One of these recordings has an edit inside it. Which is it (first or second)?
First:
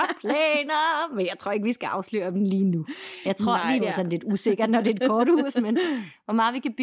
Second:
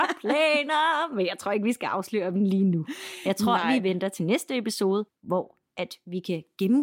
first